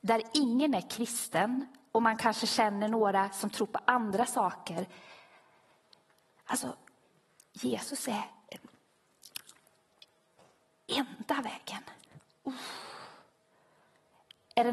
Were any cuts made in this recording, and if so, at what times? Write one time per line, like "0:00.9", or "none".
none